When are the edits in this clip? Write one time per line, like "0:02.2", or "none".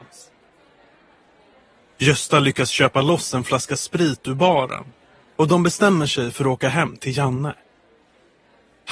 none